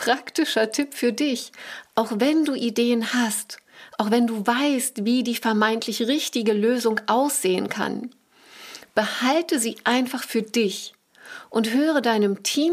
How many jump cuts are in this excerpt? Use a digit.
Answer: 0